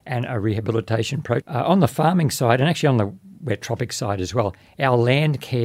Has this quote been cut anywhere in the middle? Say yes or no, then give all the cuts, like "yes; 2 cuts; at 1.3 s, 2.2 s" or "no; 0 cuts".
yes; 1 cut; at 1.4 s